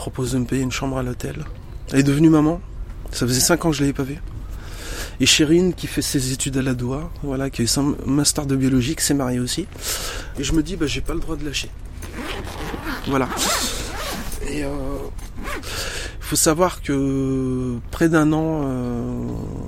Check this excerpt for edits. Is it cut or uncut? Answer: cut